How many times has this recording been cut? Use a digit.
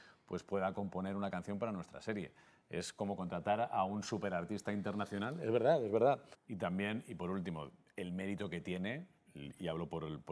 1